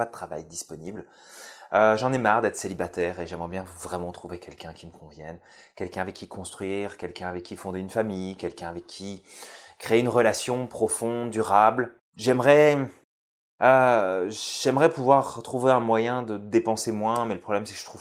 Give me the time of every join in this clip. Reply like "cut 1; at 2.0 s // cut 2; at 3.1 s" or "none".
cut 1; at 12.0 s